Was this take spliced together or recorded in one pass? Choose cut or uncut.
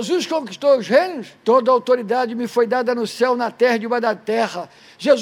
cut